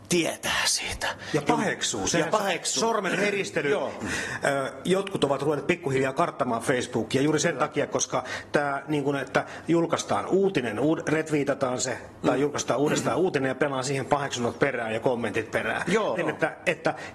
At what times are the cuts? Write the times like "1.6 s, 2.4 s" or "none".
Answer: 4.0 s, 16.1 s